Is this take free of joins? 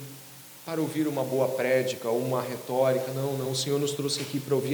yes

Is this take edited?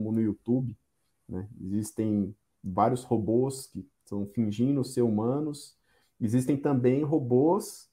no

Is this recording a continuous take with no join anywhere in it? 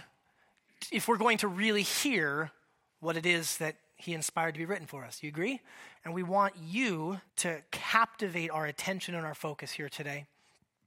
no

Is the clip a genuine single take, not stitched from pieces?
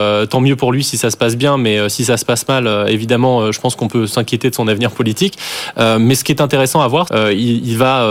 no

